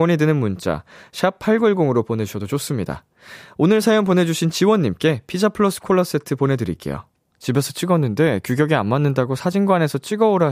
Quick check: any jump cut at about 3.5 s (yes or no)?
no